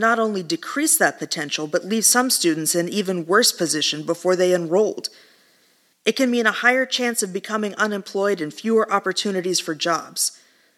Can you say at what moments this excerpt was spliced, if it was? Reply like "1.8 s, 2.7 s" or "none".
5.9 s